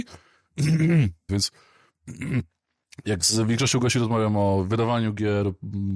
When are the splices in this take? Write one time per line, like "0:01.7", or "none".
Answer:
0:01.3

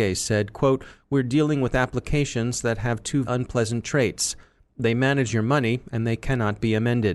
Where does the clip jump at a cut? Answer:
0:03.2

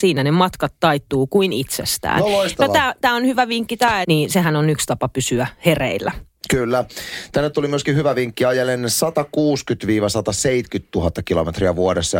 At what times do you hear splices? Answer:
0:04.0

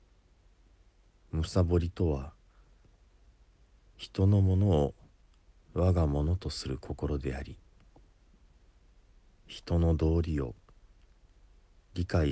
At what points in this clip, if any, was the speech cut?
none

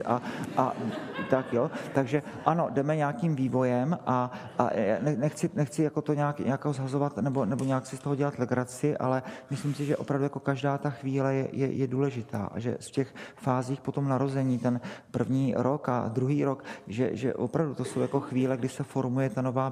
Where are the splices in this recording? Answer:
none

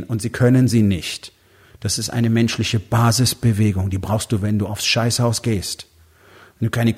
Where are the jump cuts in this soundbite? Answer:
none

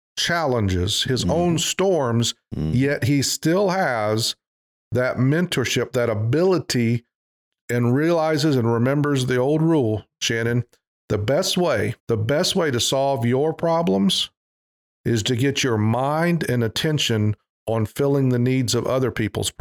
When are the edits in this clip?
0:12.0

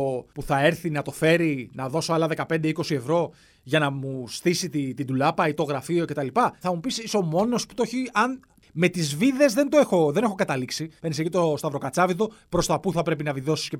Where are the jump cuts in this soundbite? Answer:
0:06.6
0:11.0

